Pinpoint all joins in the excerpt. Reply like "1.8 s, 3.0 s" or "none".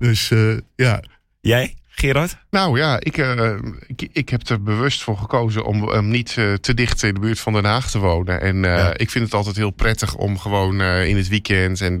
none